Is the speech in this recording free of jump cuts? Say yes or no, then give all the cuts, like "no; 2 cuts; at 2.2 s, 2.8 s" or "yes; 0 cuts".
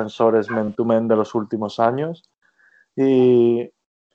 yes; 0 cuts